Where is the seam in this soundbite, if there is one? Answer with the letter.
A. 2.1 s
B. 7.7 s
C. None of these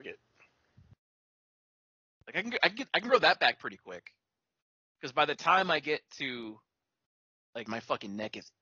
B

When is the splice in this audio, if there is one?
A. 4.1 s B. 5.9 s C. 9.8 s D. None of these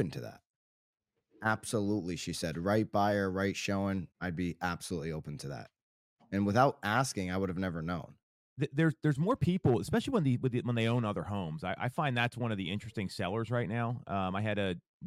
A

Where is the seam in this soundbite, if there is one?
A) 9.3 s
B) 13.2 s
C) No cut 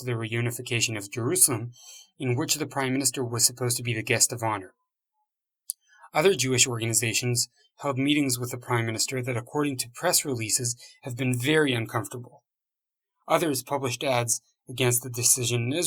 B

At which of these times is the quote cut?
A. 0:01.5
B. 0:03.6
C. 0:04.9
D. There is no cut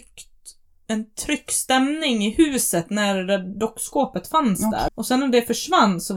C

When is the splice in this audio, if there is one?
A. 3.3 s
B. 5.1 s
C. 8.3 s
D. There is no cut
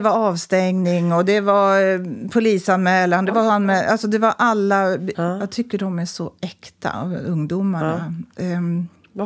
B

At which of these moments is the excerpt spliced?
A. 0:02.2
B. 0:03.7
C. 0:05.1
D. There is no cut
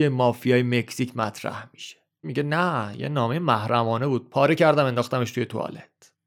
A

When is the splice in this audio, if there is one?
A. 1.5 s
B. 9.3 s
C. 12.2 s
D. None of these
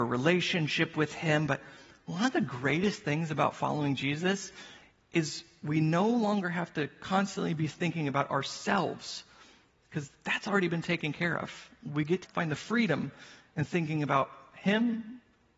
C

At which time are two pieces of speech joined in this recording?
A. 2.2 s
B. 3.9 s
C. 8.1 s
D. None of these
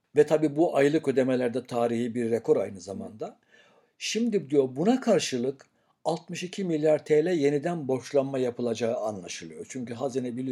D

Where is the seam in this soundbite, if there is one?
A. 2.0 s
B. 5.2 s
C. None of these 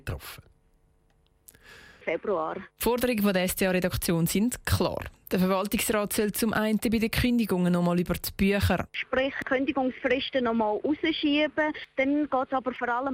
A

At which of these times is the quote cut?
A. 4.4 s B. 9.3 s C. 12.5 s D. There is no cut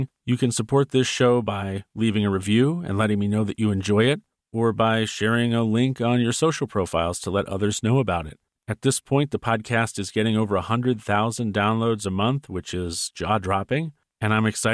A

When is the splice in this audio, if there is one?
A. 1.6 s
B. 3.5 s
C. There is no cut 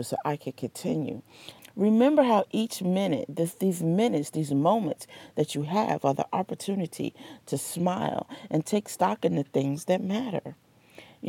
A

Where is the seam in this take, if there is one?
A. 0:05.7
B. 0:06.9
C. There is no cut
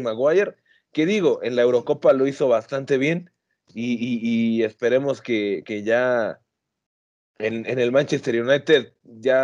C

